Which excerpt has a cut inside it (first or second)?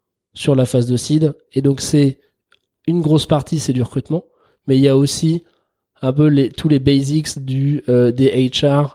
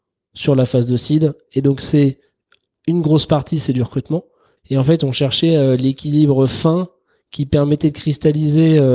second